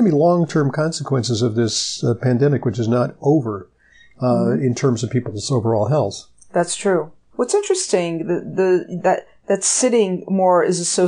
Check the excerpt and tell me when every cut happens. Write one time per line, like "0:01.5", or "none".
0:07.3

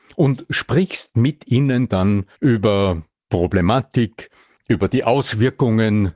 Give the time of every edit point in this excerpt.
0:02.3
0:04.6

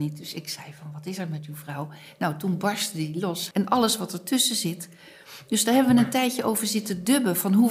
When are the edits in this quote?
0:03.5

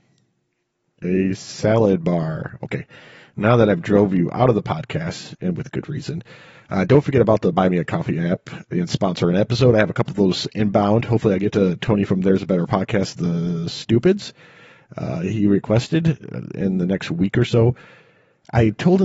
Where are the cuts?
none

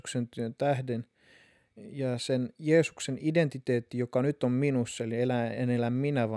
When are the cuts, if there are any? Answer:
none

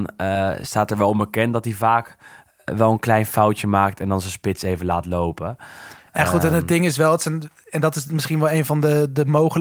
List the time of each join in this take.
none

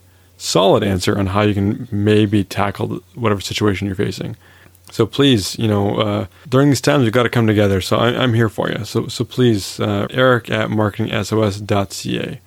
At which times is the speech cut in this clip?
0:10.1

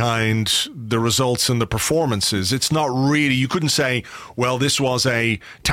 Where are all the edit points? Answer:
none

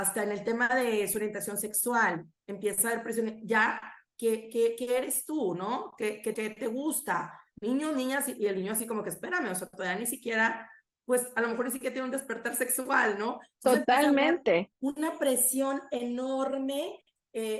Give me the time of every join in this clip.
0:06.3

